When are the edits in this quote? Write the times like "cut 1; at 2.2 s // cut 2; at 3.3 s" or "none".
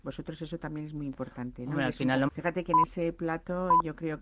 cut 1; at 2.3 s